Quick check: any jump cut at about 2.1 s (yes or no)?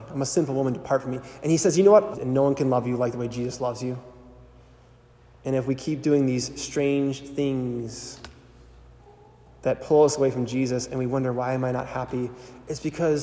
yes